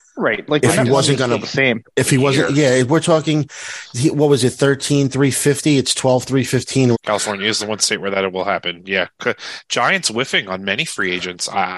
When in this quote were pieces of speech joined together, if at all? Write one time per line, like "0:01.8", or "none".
0:06.9